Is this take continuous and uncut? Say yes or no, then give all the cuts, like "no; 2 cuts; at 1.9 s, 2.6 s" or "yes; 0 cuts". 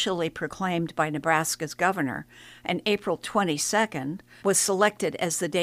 no; 1 cut; at 4.4 s